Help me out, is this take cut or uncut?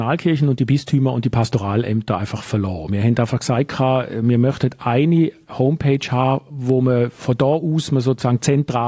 uncut